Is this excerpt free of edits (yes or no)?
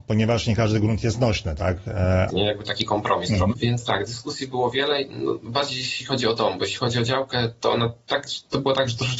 no